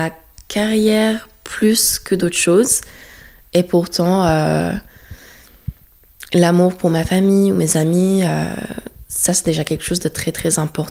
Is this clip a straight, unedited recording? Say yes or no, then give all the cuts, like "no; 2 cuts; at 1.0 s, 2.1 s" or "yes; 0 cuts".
yes; 0 cuts